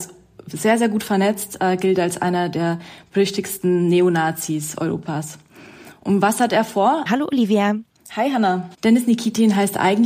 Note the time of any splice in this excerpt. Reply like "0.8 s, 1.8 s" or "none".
7.1 s, 8.7 s